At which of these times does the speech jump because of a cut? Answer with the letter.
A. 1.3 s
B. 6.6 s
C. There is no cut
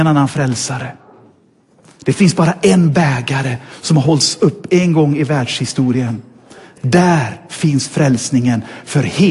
C